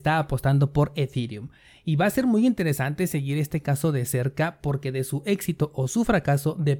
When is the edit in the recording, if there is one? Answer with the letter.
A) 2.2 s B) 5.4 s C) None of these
C